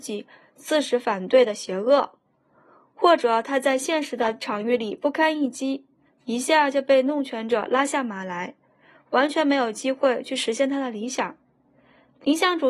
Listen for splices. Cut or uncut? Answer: uncut